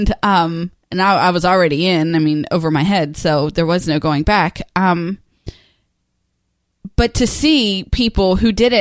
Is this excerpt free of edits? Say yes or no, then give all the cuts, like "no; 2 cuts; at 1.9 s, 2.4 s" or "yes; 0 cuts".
yes; 0 cuts